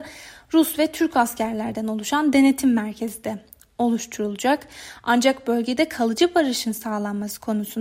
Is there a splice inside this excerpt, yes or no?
no